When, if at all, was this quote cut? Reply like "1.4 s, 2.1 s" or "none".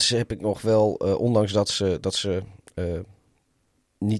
none